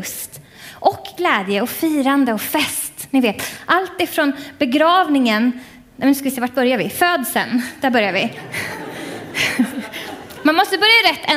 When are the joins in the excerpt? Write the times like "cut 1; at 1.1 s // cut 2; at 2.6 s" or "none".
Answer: none